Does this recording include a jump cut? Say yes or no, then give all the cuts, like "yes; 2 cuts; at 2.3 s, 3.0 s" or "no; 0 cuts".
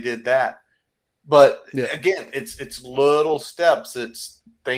no; 0 cuts